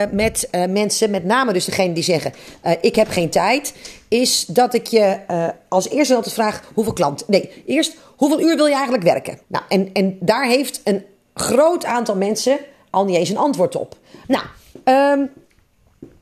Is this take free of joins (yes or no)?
no